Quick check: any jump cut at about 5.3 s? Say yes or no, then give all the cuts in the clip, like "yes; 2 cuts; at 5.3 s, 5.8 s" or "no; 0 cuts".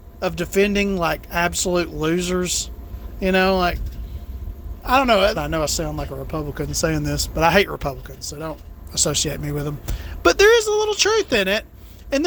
yes; 1 cut; at 5.3 s